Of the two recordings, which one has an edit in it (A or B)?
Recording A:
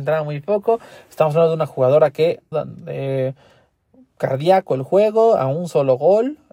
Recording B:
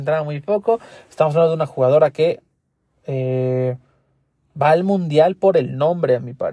A